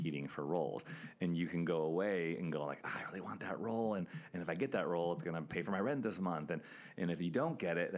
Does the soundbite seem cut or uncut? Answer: uncut